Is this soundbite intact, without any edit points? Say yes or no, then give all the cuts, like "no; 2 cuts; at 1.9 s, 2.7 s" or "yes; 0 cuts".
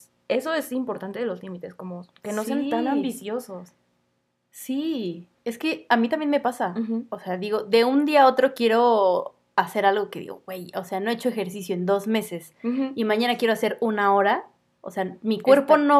yes; 0 cuts